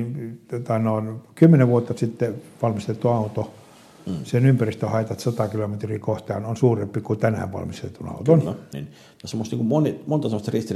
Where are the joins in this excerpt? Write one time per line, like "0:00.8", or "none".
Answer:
0:08.7